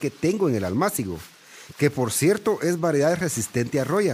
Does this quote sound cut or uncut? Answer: uncut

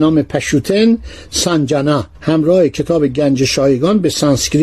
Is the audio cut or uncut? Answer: cut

